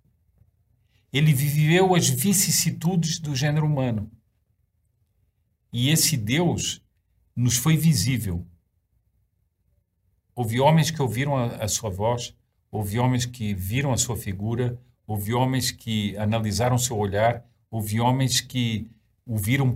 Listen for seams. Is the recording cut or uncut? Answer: uncut